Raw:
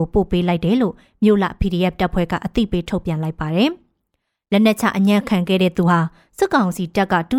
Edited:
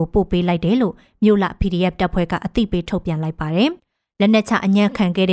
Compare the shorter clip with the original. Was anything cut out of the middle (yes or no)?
yes